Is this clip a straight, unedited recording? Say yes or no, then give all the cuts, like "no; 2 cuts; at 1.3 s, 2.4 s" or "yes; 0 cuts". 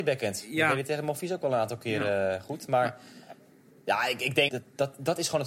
no; 1 cut; at 4.5 s